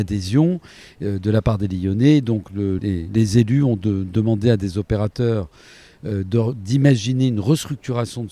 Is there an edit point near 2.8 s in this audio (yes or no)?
yes